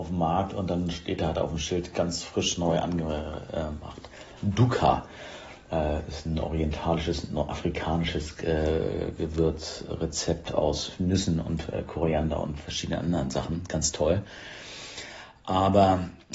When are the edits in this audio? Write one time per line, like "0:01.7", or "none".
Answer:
none